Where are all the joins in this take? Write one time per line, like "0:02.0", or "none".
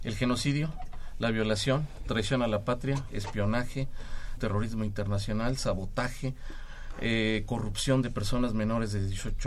0:04.4